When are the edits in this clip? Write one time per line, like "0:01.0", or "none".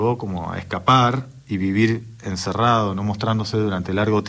none